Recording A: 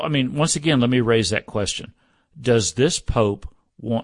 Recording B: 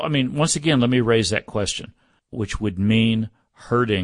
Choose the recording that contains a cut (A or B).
B